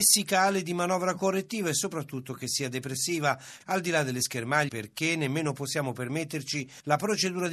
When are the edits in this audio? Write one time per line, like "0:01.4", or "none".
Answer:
0:03.6
0:04.7